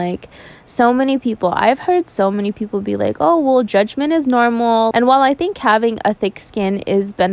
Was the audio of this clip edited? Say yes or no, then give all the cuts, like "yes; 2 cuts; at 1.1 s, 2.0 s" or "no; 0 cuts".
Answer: yes; 1 cut; at 4.9 s